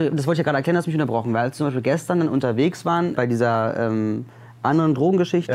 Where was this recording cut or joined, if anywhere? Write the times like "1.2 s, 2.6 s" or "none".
3.2 s